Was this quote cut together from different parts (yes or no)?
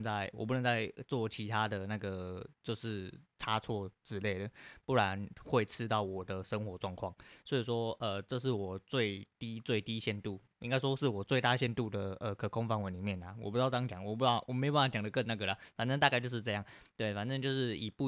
no